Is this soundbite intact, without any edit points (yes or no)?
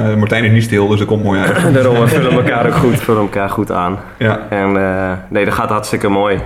no